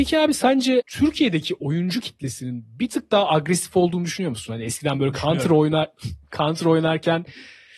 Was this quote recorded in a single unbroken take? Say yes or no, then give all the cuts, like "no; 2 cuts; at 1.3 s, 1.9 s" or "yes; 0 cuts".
yes; 0 cuts